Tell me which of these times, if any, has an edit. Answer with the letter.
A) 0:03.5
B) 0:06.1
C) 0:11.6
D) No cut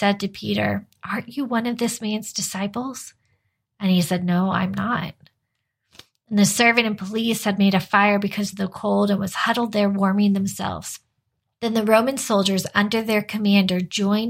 C